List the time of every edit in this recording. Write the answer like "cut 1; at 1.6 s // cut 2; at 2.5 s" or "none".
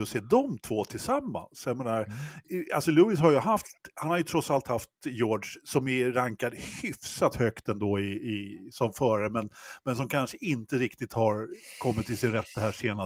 none